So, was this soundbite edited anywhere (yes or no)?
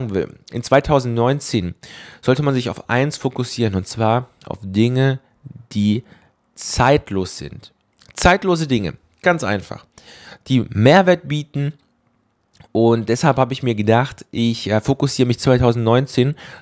no